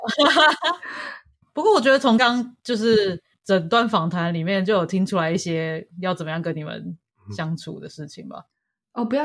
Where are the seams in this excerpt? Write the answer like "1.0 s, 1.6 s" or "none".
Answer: 2.2 s